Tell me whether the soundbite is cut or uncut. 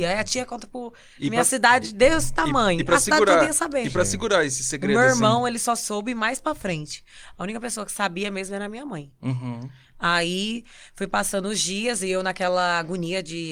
uncut